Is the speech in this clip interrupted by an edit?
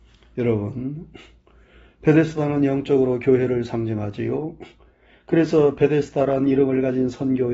no; 0 cuts

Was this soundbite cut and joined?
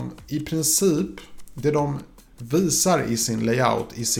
no; 0 cuts

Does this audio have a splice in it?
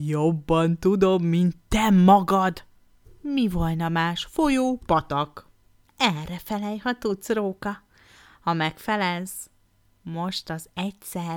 yes; 1 cut; at 5.8 s

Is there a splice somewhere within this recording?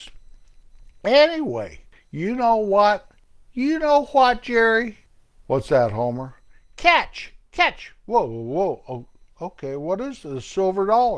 no; 0 cuts

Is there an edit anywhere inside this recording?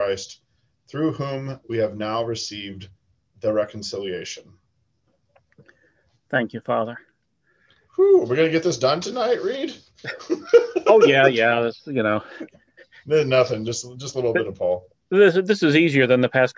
no; 0 cuts

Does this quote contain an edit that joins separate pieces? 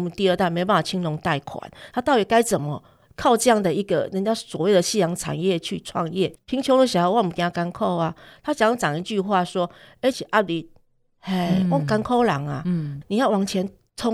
yes; 3 cuts; at 6.4 s, 10.1 s, 13.0 s

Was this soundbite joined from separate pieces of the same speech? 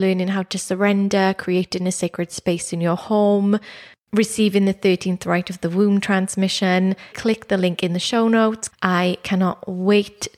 yes; 3 cuts; at 4.0 s, 7.1 s, 8.7 s

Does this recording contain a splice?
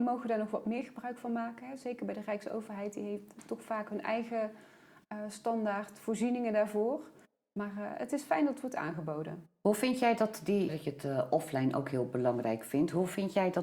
yes; 1 cut; at 10.7 s

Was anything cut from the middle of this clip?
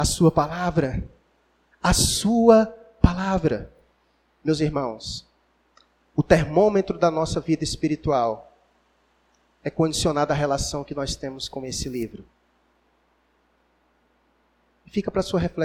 no; 0 cuts

